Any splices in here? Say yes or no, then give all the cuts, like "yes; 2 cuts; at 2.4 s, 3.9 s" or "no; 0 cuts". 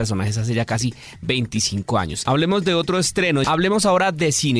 yes; 2 cuts; at 2.3 s, 3.4 s